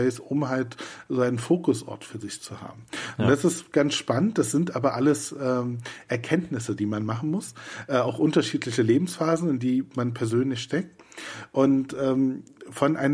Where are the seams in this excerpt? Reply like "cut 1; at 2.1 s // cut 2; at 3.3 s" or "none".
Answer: none